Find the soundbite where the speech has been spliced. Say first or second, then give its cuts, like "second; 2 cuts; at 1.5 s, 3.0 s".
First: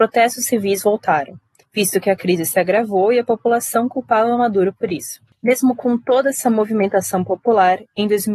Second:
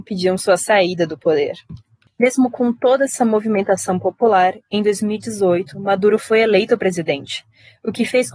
first; 1 cut; at 5.3 s